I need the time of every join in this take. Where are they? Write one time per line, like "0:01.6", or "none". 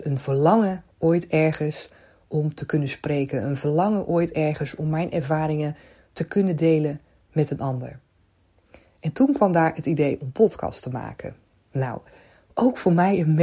none